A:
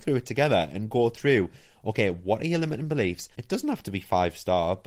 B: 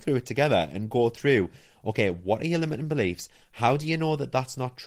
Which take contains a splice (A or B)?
A